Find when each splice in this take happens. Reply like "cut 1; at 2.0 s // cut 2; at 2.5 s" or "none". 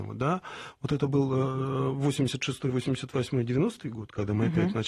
none